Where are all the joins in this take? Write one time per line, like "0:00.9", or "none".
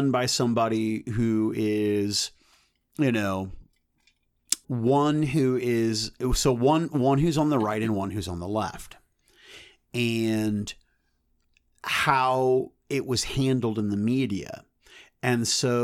0:04.6